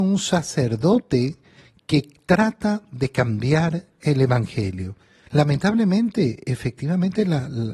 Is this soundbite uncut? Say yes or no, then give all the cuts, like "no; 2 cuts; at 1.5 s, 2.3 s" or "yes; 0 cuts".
no; 1 cut; at 5.3 s